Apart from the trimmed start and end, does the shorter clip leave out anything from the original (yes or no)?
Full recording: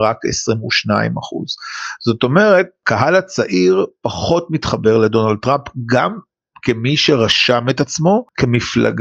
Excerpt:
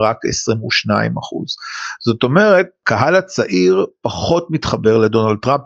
no